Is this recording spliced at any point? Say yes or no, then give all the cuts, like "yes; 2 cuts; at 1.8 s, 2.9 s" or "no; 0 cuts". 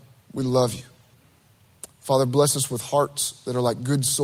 no; 0 cuts